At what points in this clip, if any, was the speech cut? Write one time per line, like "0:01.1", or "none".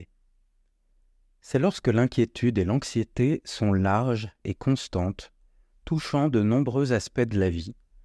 none